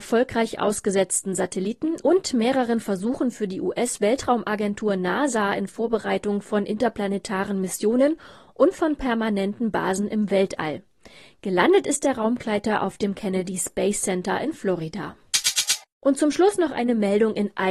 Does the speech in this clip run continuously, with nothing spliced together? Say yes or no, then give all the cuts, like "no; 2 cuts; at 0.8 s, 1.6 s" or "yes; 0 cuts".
yes; 0 cuts